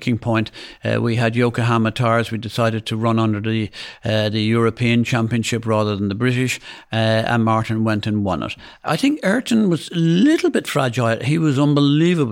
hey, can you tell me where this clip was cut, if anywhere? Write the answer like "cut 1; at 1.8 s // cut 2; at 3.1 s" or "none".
none